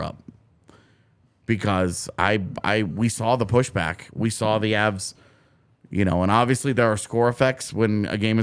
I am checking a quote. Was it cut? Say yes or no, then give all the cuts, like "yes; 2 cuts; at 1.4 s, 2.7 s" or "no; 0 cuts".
no; 0 cuts